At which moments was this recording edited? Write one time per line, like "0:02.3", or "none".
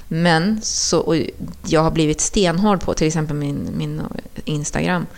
none